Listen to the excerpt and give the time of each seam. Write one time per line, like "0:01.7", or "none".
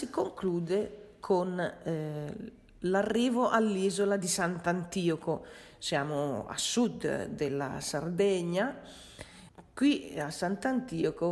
none